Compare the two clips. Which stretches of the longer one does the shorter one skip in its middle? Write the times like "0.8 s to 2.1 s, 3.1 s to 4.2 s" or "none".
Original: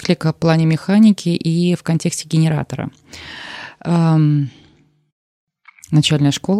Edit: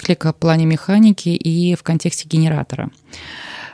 none